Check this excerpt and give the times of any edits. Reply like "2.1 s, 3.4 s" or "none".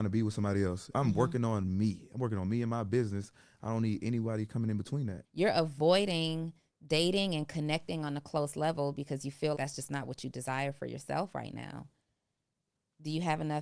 0.9 s, 5.2 s, 9.5 s